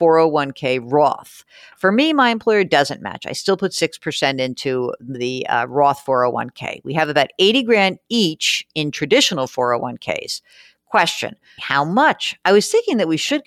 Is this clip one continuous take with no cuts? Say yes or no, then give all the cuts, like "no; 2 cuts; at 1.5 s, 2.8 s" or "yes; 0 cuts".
no; 1 cut; at 11.6 s